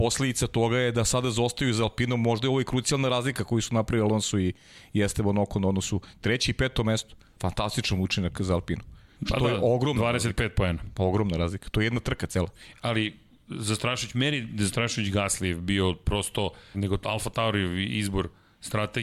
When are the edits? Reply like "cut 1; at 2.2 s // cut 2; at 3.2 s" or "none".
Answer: cut 1; at 9.1 s // cut 2; at 16.7 s